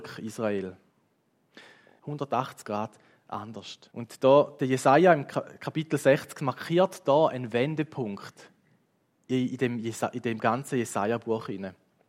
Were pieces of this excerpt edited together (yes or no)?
yes